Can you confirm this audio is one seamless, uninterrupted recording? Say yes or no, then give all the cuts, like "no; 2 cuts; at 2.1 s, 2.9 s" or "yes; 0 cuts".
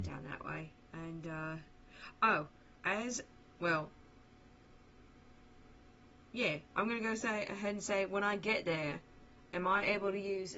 no; 2 cuts; at 2.8 s, 9.5 s